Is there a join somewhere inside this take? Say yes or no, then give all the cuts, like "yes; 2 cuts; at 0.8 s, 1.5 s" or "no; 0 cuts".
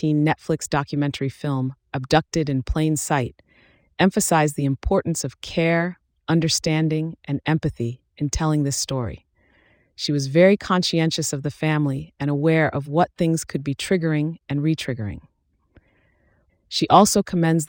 yes; 1 cut; at 16.5 s